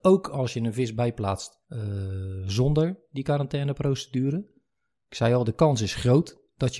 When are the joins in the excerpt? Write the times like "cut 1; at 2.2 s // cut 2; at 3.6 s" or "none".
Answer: none